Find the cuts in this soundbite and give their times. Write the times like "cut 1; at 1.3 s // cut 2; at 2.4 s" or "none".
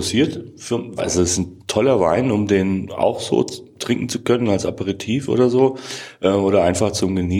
cut 1; at 1.0 s